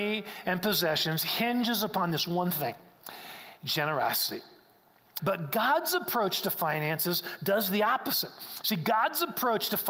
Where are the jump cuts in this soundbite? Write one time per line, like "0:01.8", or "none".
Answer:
0:05.2

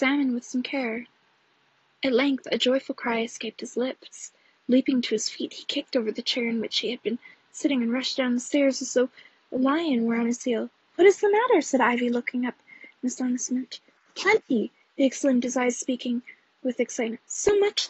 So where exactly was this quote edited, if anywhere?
none

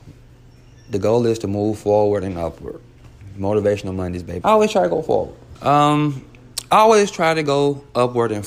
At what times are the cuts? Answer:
0:04.4
0:05.5

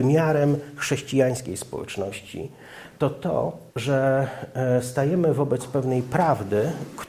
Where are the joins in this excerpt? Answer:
0:03.7

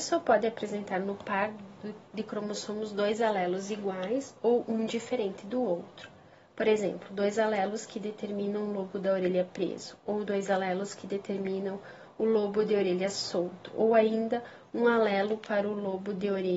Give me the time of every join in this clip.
none

